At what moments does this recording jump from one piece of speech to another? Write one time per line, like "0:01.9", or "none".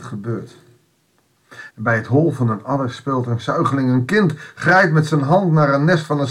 0:01.7